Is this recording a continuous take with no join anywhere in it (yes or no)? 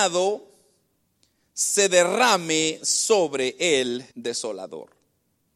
no